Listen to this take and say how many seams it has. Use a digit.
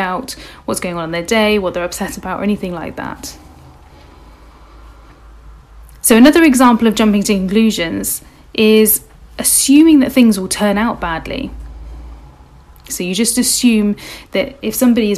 1